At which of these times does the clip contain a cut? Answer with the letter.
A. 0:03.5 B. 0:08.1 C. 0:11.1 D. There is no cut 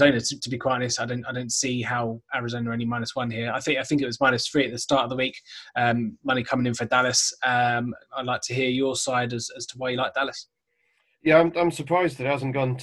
D